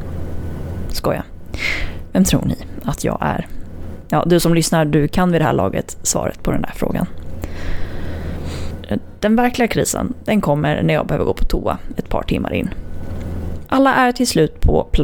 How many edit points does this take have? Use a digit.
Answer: 1